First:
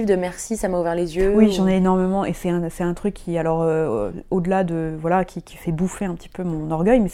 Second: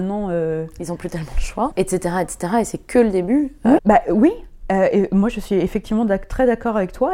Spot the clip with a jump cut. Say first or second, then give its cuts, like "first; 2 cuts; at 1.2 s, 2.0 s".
second; 2 cuts; at 1.7 s, 3.8 s